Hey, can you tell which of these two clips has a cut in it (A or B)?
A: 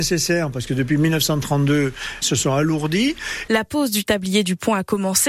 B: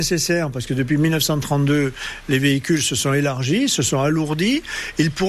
A